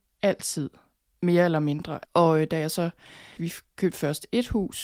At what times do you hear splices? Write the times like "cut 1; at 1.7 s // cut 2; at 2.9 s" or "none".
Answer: cut 1; at 2.0 s // cut 2; at 3.4 s